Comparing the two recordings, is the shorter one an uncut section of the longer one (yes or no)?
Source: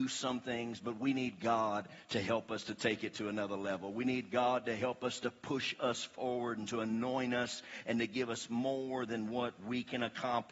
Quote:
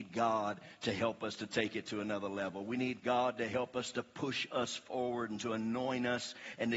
yes